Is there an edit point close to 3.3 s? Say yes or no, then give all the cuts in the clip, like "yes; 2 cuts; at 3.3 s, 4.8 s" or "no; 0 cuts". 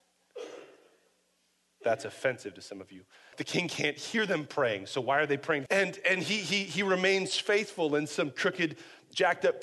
yes; 2 cuts; at 3.3 s, 5.7 s